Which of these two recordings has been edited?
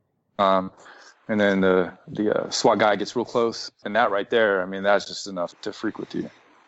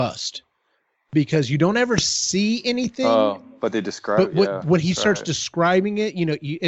first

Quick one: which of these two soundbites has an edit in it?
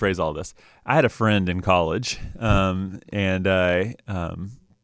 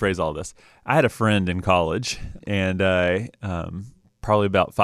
second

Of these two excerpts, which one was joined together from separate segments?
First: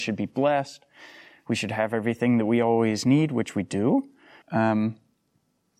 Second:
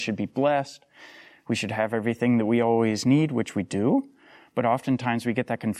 first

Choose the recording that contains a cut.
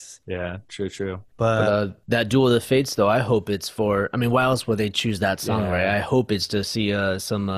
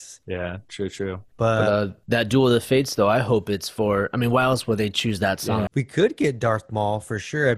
second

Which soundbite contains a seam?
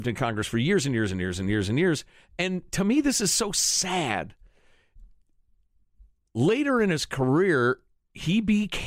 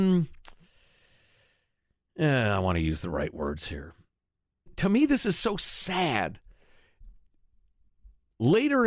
second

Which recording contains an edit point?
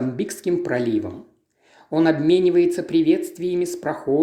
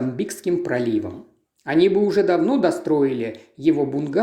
second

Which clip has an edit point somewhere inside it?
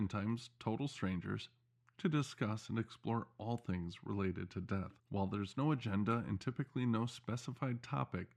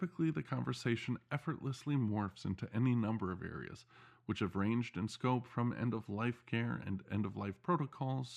first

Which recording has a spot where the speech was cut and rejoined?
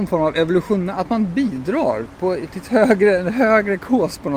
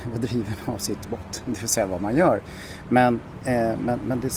first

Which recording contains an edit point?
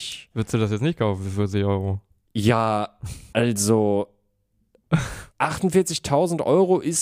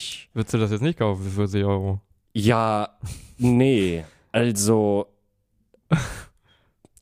first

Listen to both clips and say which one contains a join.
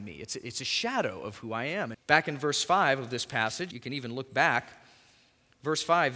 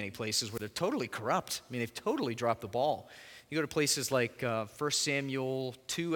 first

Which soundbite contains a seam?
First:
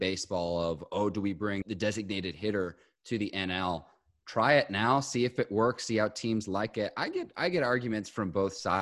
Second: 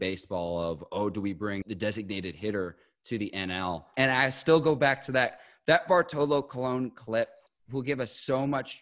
second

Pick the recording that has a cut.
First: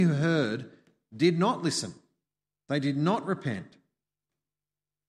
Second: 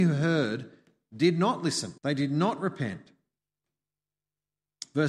second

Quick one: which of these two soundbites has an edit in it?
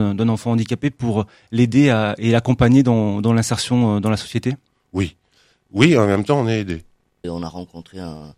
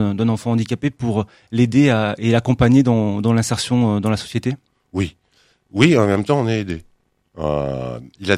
first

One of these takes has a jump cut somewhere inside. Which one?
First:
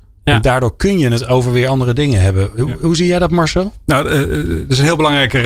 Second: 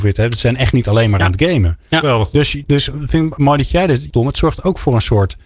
second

